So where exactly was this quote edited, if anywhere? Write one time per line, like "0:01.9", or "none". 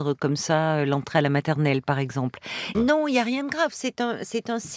0:02.7